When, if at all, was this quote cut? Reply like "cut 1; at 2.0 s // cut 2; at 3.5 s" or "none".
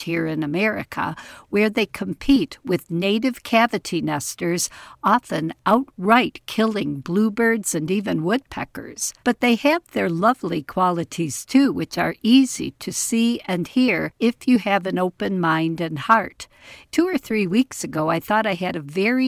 cut 1; at 9.2 s // cut 2; at 16.8 s